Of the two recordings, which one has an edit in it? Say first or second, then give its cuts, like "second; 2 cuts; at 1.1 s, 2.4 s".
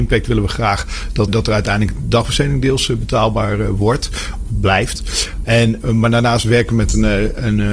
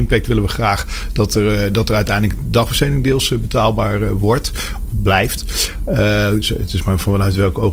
first; 2 cuts; at 1.3 s, 5.4 s